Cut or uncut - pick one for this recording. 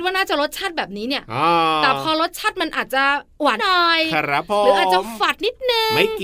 cut